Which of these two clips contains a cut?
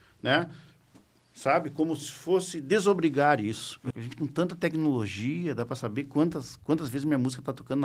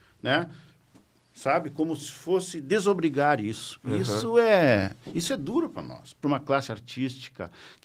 first; 1 cut; at 3.9 s

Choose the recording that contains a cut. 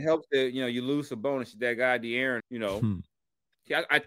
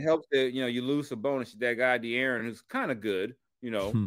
first; 1 cut; at 2.4 s

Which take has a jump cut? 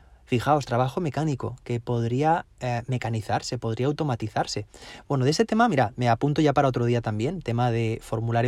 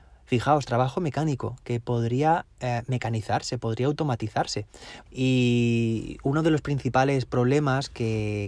second; 1 cut; at 5.1 s

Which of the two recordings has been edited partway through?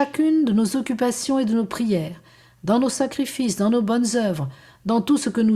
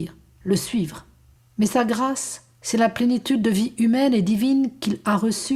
second; 2 cuts; at 1.4 s, 2.5 s

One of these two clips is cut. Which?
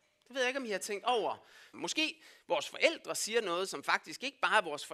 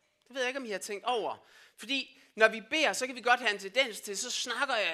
first; 1 cut; at 1.7 s

